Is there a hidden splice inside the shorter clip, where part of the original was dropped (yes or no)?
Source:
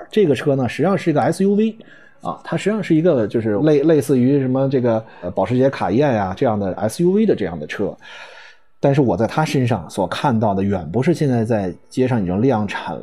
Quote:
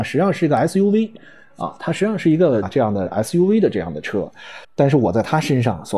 yes